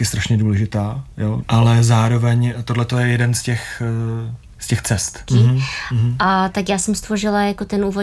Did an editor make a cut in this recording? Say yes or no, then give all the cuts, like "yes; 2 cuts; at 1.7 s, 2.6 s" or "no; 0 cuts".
yes; 2 cuts; at 1.4 s, 5.3 s